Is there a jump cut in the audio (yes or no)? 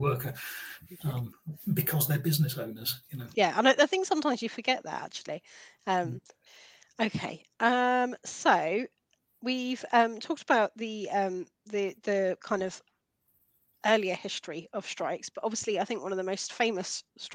yes